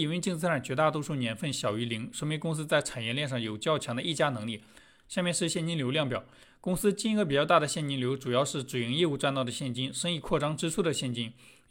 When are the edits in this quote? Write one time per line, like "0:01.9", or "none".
none